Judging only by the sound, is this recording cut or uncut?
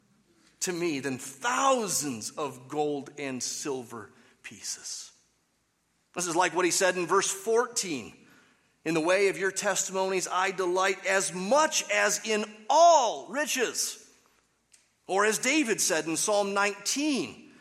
uncut